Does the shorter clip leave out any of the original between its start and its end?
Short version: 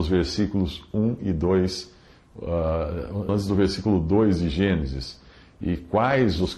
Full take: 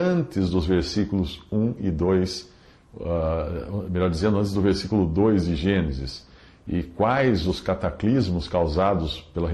yes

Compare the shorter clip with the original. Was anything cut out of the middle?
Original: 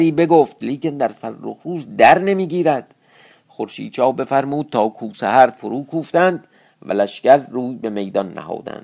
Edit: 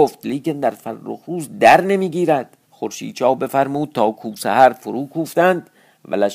yes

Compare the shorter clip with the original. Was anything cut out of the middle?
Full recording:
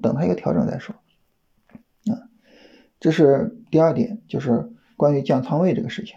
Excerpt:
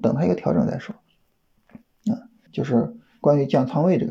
yes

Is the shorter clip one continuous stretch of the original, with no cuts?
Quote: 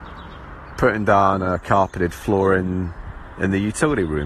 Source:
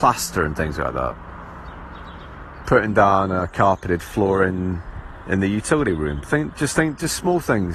yes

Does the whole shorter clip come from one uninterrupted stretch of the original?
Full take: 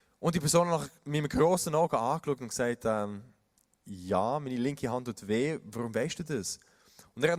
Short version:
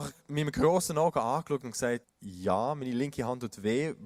no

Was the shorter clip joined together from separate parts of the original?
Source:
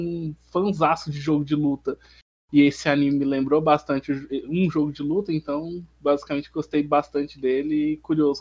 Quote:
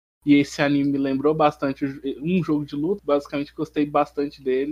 yes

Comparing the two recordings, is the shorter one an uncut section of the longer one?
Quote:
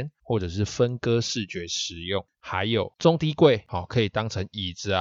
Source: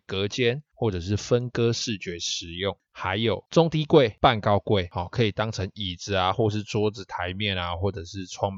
no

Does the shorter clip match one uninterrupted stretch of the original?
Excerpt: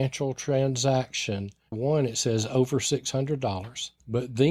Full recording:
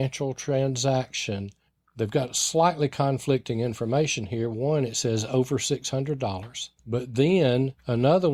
no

